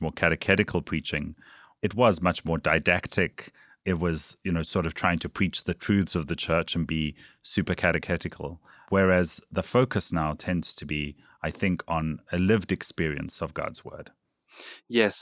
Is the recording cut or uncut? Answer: uncut